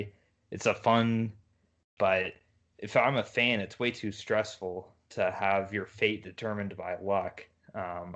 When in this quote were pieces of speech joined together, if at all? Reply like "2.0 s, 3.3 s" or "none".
2.0 s